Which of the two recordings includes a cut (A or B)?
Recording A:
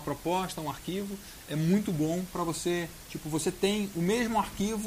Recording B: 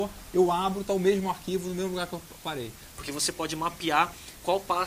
B